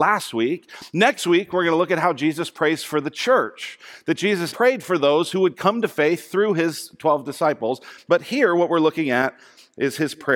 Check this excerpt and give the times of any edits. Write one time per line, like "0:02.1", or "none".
0:04.5